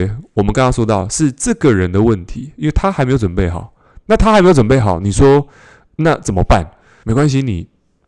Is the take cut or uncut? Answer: cut